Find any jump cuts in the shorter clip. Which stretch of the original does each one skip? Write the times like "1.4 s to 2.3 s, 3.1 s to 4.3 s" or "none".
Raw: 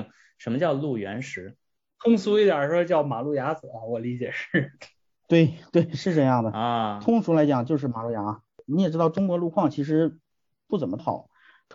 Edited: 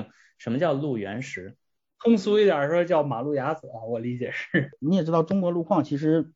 4.7 s to 8.6 s